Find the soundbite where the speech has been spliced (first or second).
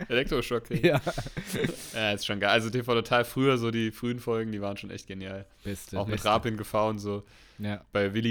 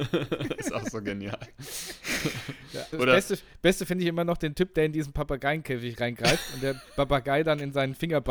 second